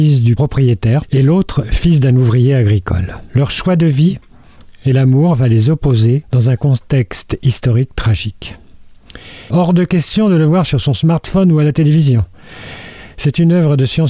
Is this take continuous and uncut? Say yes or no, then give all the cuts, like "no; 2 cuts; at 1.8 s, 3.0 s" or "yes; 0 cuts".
no; 1 cut; at 9.5 s